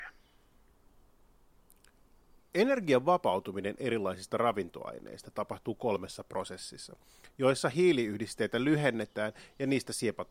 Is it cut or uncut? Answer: uncut